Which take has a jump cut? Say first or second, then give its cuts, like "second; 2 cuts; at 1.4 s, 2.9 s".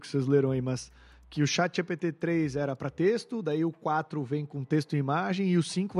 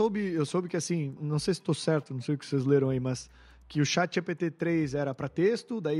second; 1 cut; at 1.2 s